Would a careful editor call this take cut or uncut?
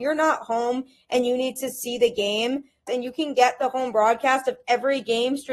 cut